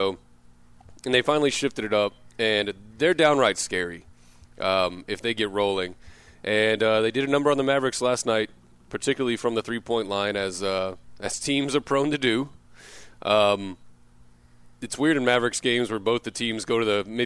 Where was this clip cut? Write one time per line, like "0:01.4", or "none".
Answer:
none